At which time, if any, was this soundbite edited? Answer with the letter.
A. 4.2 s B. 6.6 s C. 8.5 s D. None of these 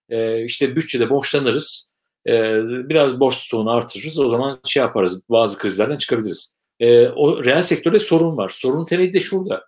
B